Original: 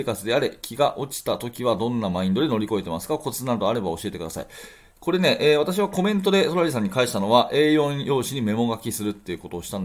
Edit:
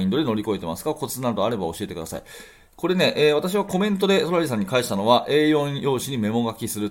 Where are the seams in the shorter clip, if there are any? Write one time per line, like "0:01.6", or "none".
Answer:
none